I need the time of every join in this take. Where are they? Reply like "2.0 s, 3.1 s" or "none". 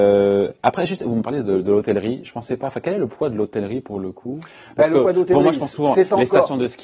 none